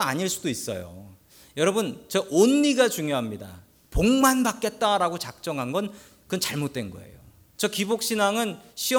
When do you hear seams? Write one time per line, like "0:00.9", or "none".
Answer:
0:07.6